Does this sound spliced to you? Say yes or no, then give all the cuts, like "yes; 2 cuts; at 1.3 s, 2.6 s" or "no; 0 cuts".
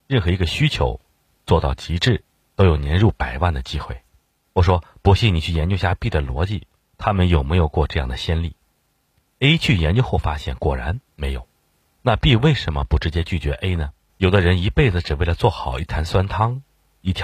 yes; 3 cuts; at 4.4 s, 12.0 s, 14.1 s